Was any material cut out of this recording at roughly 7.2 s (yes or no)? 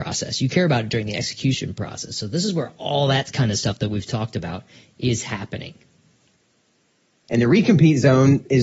yes